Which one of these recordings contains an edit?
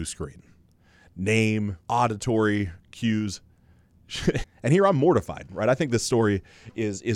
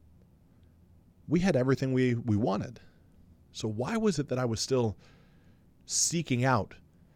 first; 2 cuts; at 1.8 s, 4.4 s

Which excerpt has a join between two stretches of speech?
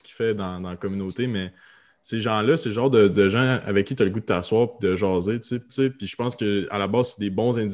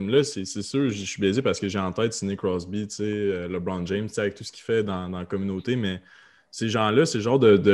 first; 1 cut; at 5.7 s

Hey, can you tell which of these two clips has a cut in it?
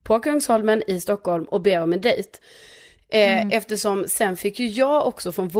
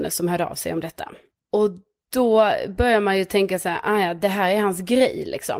first; 1 cut; at 3.0 s

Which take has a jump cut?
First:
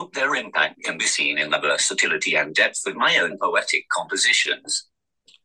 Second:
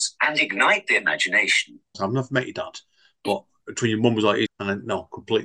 second; 2 cuts; at 1.9 s, 4.5 s

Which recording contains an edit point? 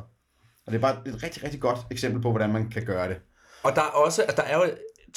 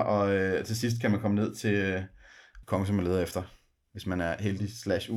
second; 1 cut; at 2.6 s

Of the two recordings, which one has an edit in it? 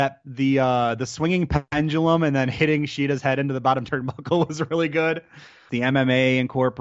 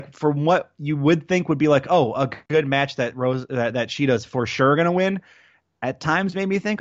first; 1 cut; at 5.7 s

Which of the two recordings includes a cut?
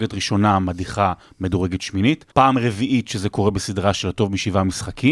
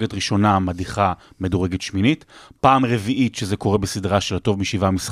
first; 1 cut; at 2.3 s

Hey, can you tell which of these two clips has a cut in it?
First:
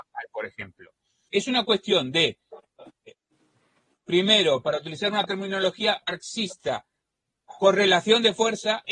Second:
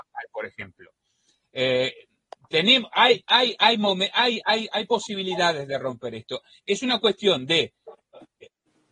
first; 1 cut; at 1.3 s

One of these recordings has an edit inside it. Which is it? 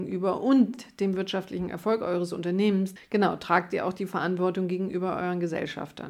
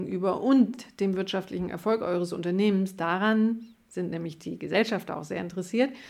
first; 1 cut; at 3.0 s

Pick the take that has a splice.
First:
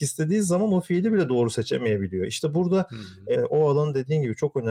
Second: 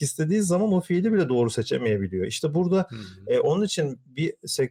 first; 1 cut; at 3.3 s

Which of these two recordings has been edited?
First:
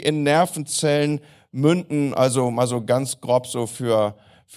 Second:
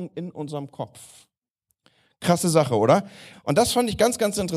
second; 1 cut; at 3.3 s

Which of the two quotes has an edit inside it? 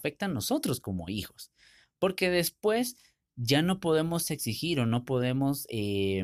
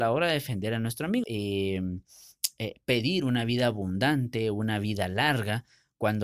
second; 1 cut; at 1.2 s

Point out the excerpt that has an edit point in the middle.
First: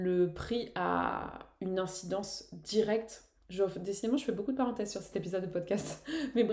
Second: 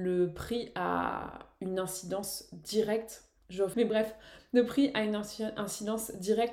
second; 1 cut; at 3.7 s

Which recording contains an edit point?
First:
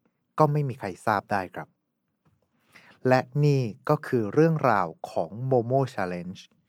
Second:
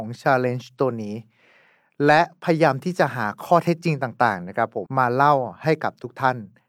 second; 1 cut; at 4.9 s

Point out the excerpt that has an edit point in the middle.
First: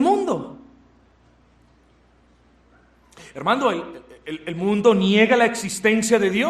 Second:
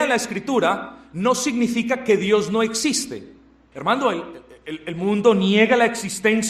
second; 1 cut; at 3.7 s

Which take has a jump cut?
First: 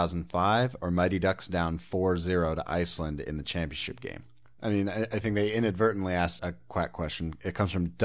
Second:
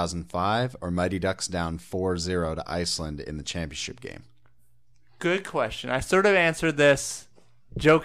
first; 2 cuts; at 4.6 s, 6.4 s

